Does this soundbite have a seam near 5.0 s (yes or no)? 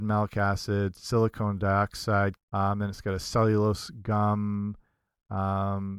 no